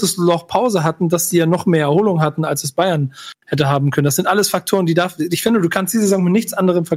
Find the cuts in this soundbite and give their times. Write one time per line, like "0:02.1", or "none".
none